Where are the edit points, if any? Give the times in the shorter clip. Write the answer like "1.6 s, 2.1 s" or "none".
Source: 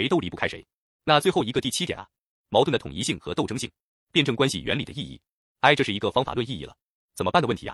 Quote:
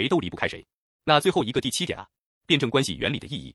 2.3 s